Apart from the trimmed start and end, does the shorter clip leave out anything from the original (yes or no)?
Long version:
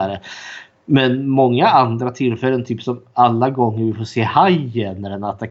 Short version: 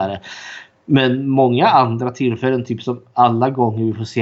no